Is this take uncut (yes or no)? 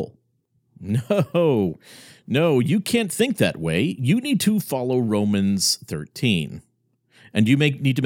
yes